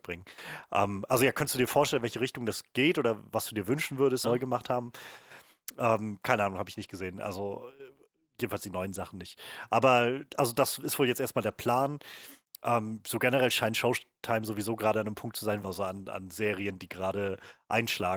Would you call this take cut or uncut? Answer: cut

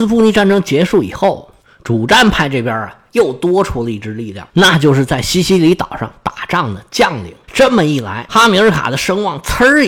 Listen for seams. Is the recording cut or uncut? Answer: cut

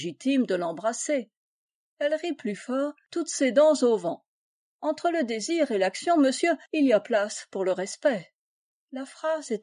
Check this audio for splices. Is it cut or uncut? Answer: uncut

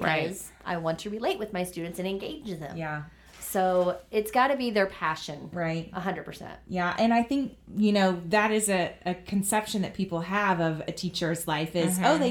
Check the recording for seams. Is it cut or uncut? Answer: uncut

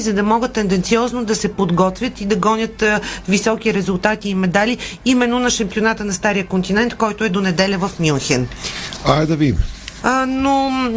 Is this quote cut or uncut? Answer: cut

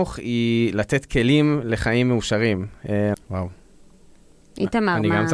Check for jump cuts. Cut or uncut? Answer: cut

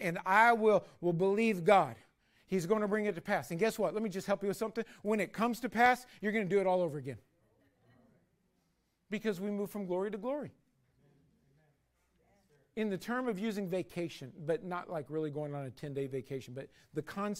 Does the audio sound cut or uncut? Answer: cut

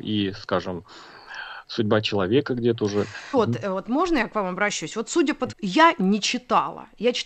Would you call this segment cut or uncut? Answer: cut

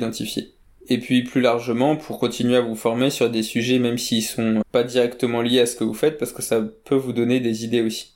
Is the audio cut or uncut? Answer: cut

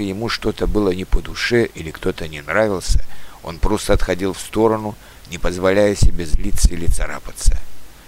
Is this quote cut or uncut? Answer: uncut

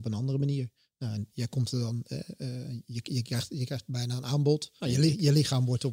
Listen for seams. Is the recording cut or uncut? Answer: cut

